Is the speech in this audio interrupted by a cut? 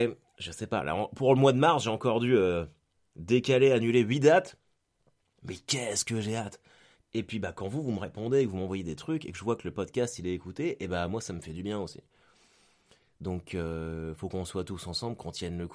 yes; 2 cuts; at 5.3 s, 7.0 s

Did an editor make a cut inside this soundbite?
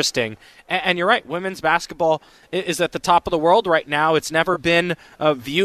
no; 0 cuts

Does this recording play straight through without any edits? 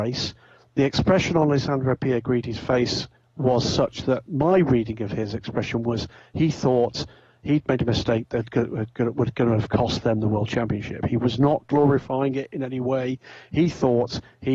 yes; 0 cuts

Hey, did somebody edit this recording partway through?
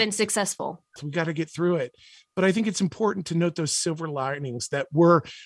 yes; 1 cut; at 1.0 s

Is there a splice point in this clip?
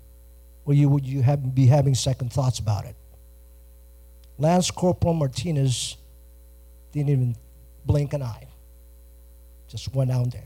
no; 0 cuts

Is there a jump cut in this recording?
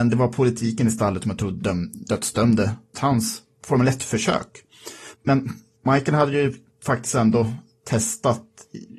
yes; 2 cuts; at 2.9 s, 5.1 s

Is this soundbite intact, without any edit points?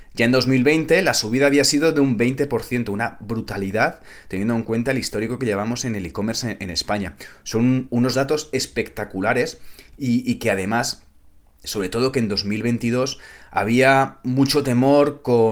no; 1 cut; at 11.6 s

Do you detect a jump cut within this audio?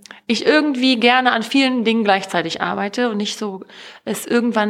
no; 0 cuts

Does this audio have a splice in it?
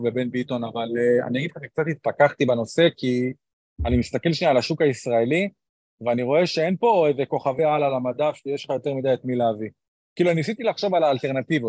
no; 0 cuts

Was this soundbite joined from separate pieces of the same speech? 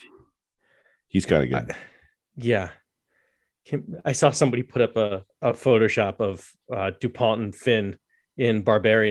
yes; 1 cut; at 5.3 s

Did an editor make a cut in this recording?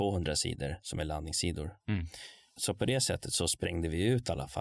yes; 1 cut; at 1.8 s

